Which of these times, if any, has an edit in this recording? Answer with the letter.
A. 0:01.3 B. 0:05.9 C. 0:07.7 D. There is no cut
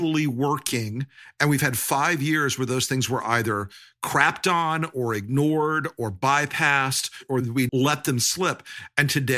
C